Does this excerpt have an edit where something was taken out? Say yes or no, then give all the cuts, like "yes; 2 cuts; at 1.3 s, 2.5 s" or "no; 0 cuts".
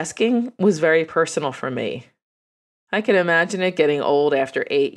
yes; 1 cut; at 2.7 s